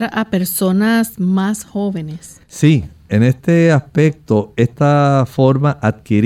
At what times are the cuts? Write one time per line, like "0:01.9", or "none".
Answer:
none

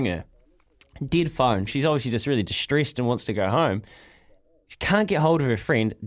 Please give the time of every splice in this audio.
0:01.7

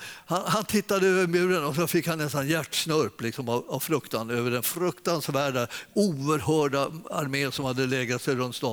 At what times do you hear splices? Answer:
none

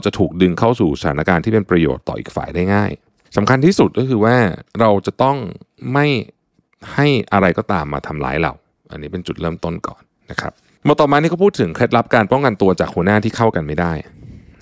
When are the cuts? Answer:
none

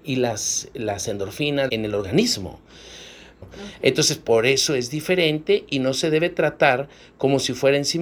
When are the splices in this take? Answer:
0:01.7
0:03.4

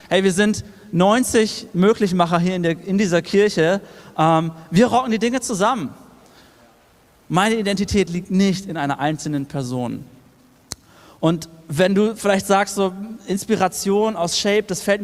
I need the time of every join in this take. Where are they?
none

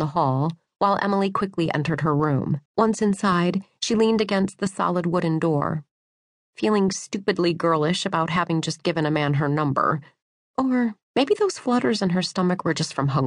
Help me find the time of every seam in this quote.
0:02.7
0:11.0

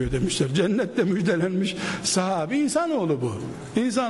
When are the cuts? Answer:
none

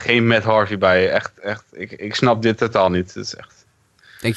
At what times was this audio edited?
none

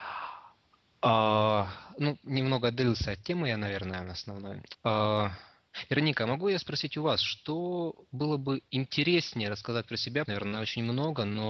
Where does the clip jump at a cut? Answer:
0:04.7
0:10.3

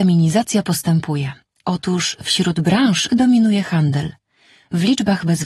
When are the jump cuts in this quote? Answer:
0:01.6
0:03.1

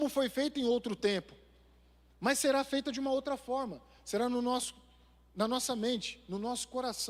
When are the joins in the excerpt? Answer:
none

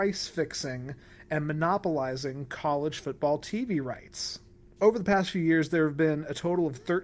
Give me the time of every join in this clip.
0:04.8

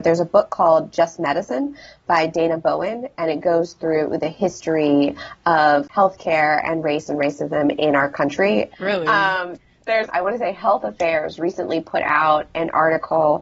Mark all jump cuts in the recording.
0:08.7
0:10.1

